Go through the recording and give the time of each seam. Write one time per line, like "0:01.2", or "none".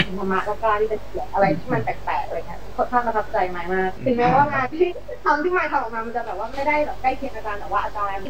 none